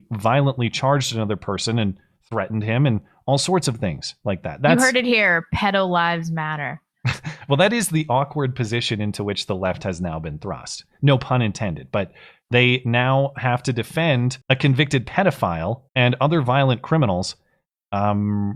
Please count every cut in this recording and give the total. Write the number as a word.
two